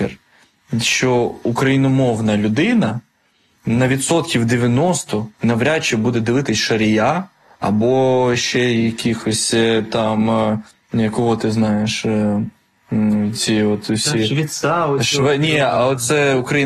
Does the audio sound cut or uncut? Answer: cut